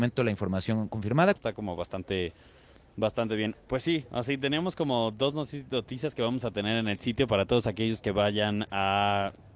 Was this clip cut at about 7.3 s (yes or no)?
no